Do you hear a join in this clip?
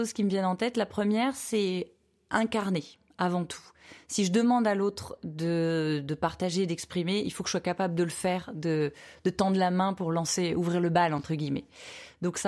no; 0 cuts

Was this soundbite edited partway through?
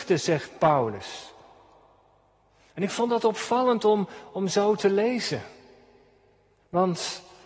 no; 0 cuts

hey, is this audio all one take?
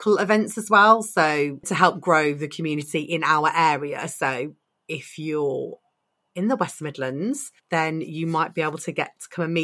no; 1 cut; at 7.6 s

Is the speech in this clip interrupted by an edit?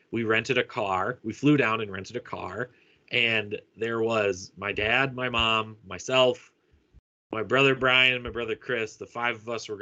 no; 0 cuts

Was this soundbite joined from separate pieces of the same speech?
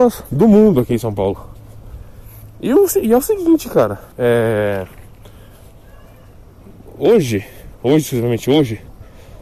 yes; 1 cut; at 4.1 s

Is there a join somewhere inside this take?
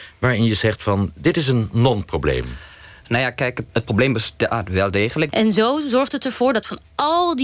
yes; 2 cuts; at 3.7 s, 5.3 s

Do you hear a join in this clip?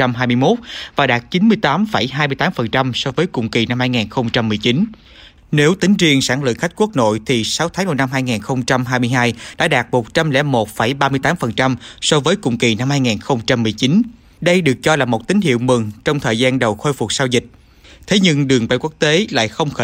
no; 0 cuts

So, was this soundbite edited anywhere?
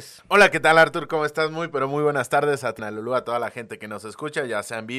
yes; 1 cut; at 2.8 s

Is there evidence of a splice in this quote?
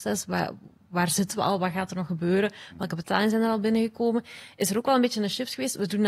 no; 0 cuts

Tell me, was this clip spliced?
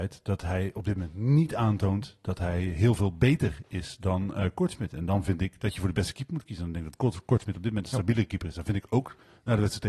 no; 0 cuts

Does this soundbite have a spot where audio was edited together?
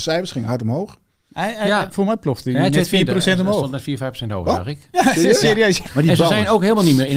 yes; 1 cut; at 5.8 s

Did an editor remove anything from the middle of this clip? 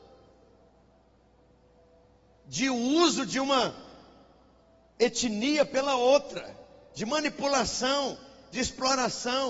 no; 0 cuts

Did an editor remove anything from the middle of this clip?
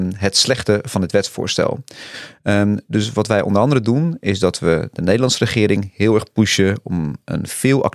no; 0 cuts

